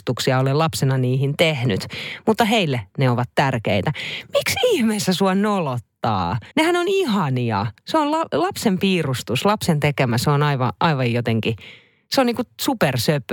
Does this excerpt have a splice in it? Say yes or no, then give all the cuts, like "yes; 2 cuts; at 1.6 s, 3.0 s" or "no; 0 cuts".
yes; 1 cut; at 6.5 s